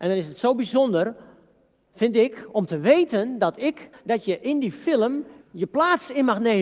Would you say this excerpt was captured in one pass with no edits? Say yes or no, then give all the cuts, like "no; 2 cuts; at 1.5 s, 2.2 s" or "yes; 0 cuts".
no; 2 cuts; at 3.9 s, 5.4 s